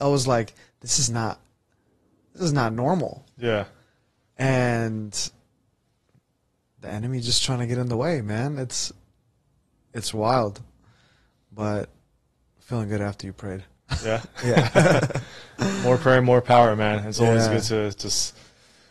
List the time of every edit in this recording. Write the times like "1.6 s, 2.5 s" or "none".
none